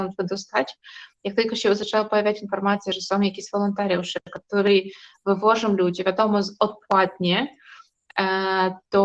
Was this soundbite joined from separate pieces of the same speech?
no; 0 cuts

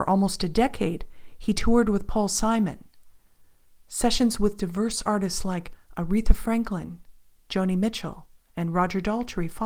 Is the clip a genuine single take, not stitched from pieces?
yes; 0 cuts

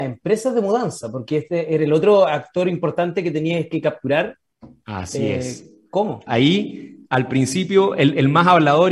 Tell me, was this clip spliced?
yes; 1 cut; at 6.3 s

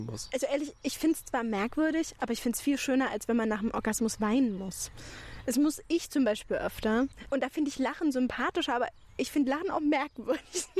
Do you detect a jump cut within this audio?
yes; 1 cut; at 7.3 s

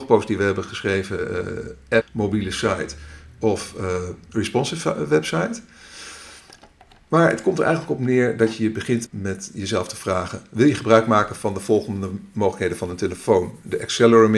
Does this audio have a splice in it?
yes; 2 cuts; at 2.0 s, 9.1 s

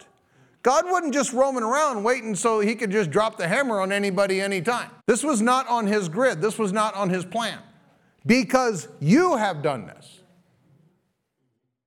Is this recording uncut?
no; 1 cut; at 5.0 s

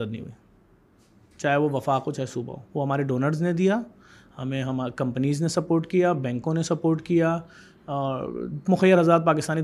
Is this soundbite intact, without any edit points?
no; 1 cut; at 2.6 s

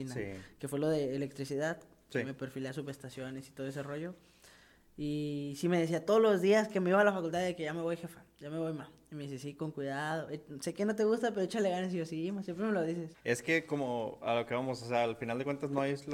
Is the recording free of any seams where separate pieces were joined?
no; 1 cut; at 13.1 s

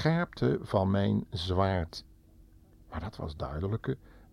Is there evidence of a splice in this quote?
no; 0 cuts

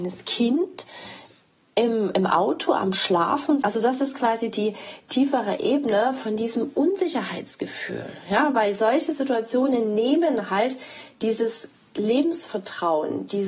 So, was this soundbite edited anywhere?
yes; 1 cut; at 3.6 s

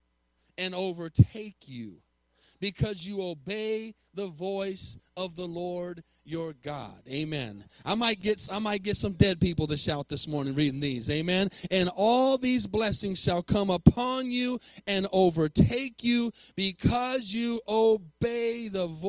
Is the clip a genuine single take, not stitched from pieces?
yes; 0 cuts

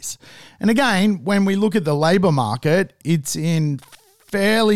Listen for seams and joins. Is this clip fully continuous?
no; 1 cut; at 3.0 s

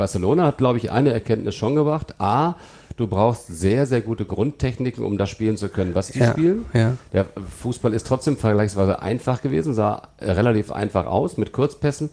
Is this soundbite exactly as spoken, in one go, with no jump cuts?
yes; 0 cuts

